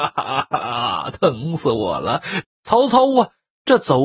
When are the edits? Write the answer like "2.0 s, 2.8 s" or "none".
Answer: 2.4 s